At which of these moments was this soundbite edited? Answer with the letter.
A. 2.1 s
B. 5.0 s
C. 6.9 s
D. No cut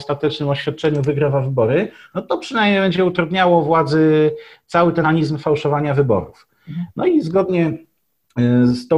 B